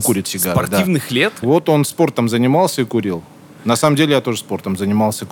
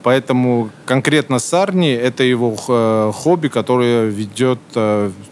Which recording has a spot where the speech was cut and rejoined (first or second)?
first